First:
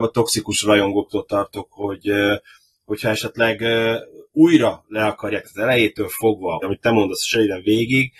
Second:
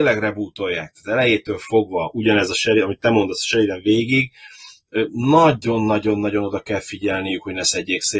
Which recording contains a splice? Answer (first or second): first